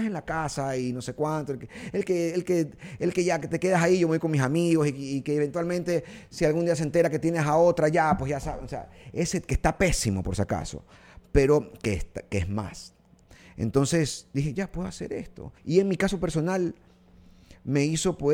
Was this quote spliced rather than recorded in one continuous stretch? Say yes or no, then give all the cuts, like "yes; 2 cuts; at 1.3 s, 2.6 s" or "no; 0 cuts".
yes; 1 cut; at 15.6 s